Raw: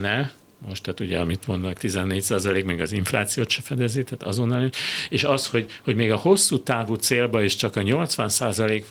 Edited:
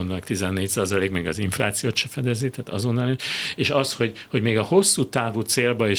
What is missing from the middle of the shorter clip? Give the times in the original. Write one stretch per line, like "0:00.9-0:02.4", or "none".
none